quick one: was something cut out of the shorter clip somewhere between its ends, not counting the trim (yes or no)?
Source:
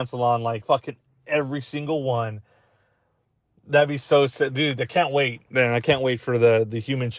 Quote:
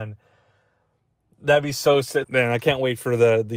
yes